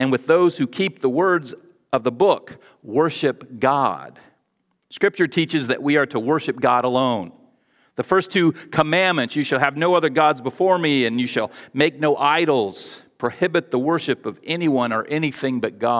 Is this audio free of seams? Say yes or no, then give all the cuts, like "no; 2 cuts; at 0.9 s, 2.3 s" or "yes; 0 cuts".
yes; 0 cuts